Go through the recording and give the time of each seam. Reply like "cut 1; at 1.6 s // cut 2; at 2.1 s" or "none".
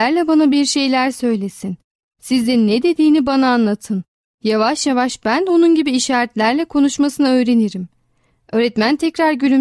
none